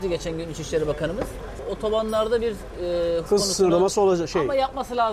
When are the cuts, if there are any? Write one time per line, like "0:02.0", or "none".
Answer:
0:03.3